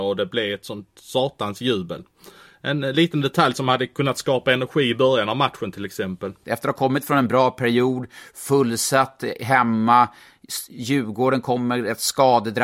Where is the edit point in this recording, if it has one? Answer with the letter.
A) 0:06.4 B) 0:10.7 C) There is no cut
A